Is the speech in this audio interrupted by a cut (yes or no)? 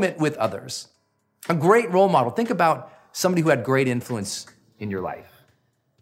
no